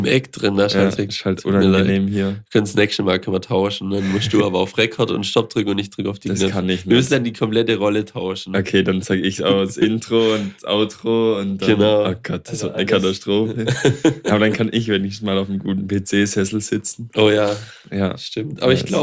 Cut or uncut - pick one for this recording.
cut